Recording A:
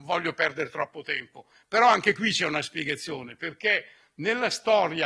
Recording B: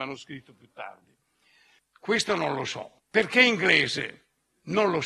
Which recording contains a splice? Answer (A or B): B